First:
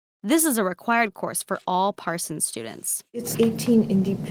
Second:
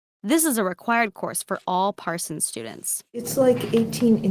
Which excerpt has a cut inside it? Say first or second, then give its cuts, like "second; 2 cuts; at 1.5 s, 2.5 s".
first; 1 cut; at 3.3 s